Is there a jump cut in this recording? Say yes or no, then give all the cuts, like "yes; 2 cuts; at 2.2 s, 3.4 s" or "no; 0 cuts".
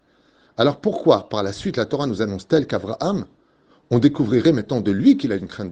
no; 0 cuts